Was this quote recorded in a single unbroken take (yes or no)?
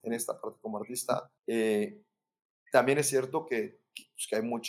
no